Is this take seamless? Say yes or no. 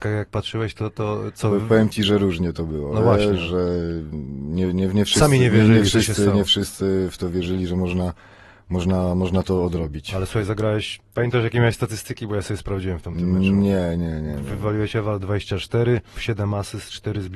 no